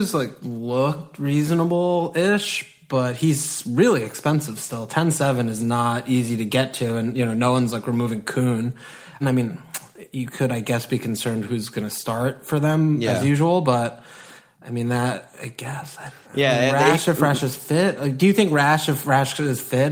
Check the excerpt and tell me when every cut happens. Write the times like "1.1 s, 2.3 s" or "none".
9.2 s